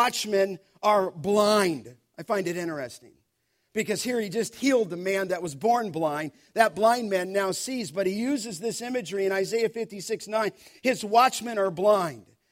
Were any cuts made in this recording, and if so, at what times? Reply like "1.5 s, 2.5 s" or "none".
none